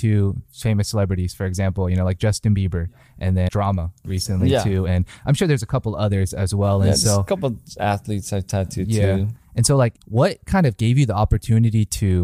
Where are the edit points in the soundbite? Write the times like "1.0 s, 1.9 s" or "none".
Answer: 3.5 s